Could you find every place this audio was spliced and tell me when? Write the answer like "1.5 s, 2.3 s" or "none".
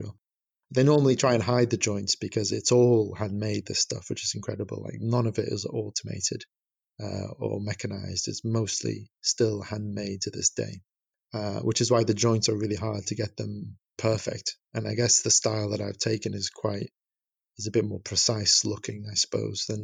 none